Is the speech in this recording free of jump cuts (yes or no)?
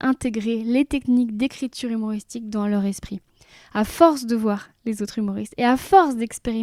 yes